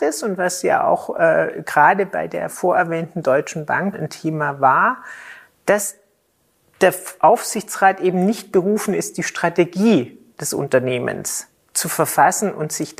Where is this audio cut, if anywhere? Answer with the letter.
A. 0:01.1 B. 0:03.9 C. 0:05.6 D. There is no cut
B